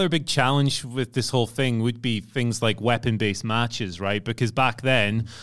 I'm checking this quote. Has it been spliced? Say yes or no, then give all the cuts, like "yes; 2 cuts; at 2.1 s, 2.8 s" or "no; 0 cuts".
no; 0 cuts